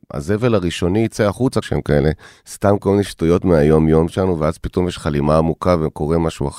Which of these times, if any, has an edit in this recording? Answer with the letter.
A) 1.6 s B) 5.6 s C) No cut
A